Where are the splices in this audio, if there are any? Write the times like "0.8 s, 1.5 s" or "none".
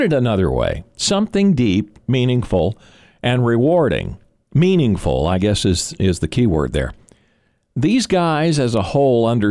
none